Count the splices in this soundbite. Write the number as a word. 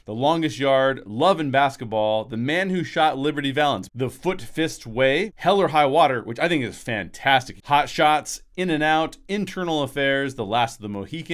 three